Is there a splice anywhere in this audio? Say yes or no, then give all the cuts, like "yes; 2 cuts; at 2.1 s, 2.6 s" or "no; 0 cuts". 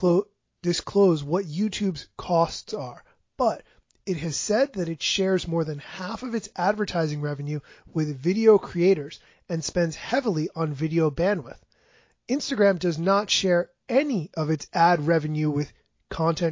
no; 0 cuts